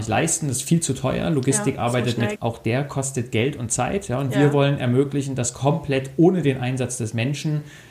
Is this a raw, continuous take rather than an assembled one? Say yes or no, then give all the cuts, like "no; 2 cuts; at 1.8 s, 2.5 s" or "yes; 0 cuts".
no; 1 cut; at 2.4 s